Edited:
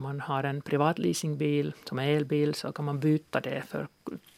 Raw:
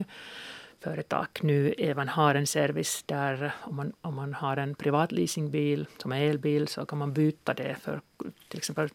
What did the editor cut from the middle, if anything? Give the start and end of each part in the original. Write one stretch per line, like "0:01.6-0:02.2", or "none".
none